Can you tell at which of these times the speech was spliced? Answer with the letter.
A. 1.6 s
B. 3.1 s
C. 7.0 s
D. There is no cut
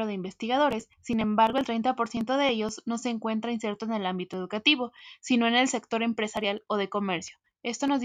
D